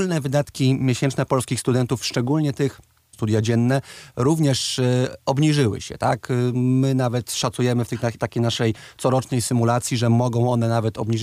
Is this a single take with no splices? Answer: no; 1 cut; at 3.1 s

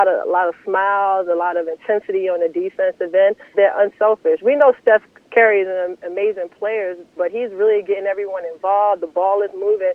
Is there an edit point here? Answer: yes; 2 cuts; at 3.5 s, 7.2 s

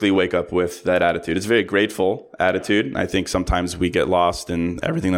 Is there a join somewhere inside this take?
no; 0 cuts

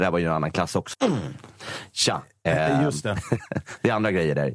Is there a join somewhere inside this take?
yes; 1 cut; at 0.9 s

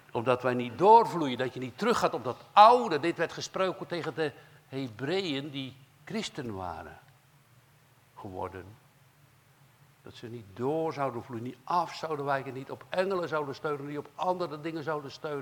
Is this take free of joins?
yes; 0 cuts

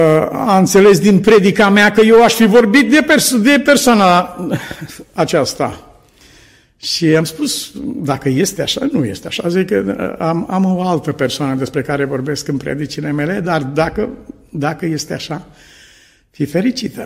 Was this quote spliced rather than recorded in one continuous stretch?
no; 0 cuts

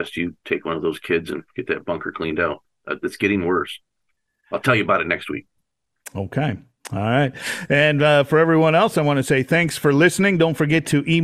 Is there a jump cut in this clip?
no; 0 cuts

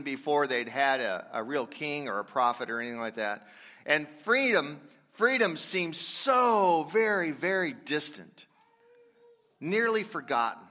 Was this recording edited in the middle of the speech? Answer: no; 0 cuts

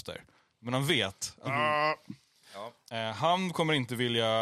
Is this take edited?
yes; 2 cuts; at 1.5 s, 2.9 s

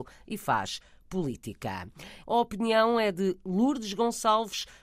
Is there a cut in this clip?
yes; 1 cut; at 2.2 s

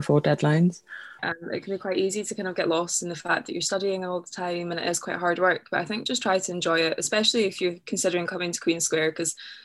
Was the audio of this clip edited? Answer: yes; 1 cut; at 1.2 s

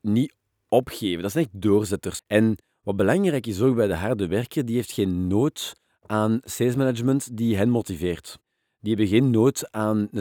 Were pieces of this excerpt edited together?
yes; 1 cut; at 2.2 s

